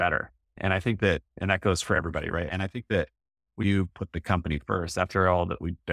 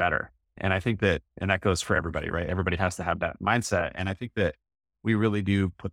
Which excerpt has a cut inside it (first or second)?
first